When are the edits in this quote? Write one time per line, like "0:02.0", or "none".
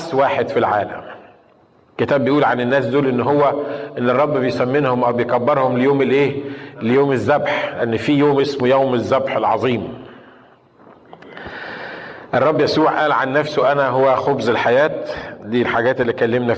none